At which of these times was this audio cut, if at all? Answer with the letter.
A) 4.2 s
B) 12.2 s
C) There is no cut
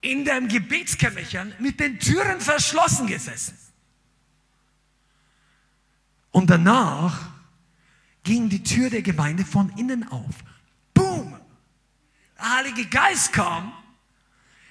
C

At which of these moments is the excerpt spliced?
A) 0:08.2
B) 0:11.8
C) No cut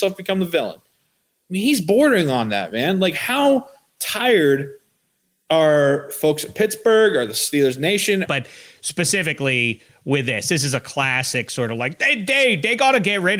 A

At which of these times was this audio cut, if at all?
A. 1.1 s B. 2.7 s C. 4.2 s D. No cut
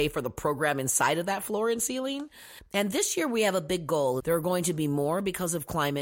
C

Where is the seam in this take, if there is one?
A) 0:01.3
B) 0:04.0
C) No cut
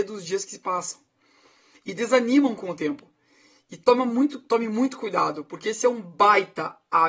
C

